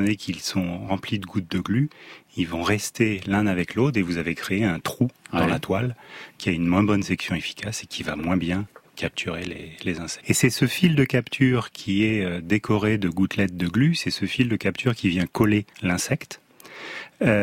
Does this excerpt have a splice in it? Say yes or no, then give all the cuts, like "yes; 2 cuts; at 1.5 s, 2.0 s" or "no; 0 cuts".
yes; 2 cuts; at 10.2 s, 15.7 s